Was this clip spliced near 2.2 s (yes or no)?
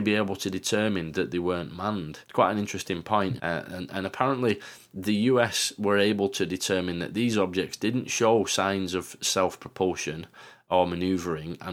yes